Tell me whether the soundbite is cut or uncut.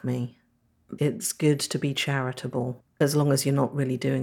cut